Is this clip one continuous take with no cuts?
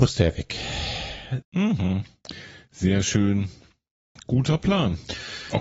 no; 2 cuts; at 1.4 s, 4.2 s

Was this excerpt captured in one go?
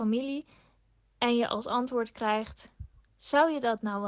yes; 0 cuts

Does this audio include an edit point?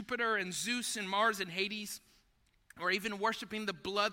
no; 0 cuts

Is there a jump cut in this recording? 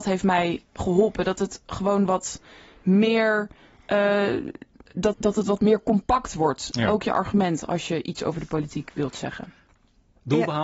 yes; 1 cut; at 5.1 s

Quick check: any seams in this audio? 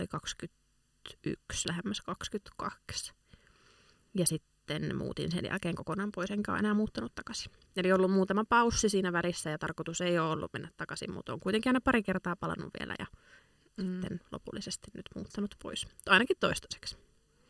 no; 0 cuts

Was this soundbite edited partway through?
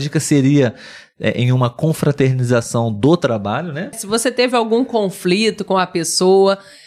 yes; 1 cut; at 3.9 s

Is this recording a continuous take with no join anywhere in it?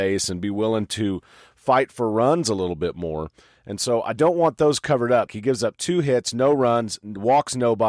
no; 1 cut; at 5.3 s

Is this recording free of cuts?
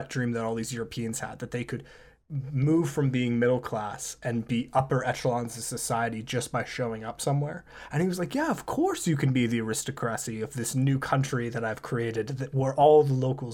yes; 0 cuts

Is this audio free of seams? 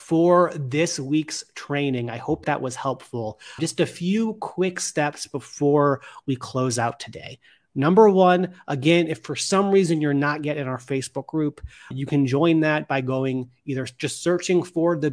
yes; 0 cuts

